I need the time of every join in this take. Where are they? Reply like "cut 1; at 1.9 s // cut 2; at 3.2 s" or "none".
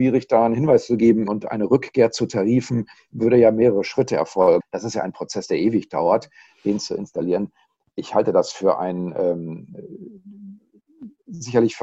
cut 1; at 1.3 s // cut 2; at 4.6 s

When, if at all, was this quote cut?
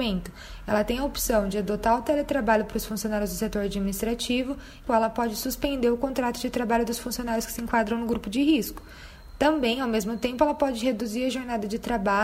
cut 1; at 4.9 s

